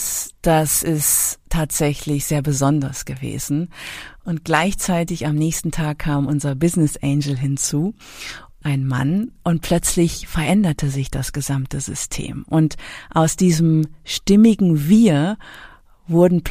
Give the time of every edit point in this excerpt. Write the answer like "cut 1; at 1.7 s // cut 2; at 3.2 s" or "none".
none